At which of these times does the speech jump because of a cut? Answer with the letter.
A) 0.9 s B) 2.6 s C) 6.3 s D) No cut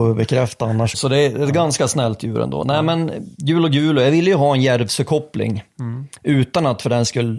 A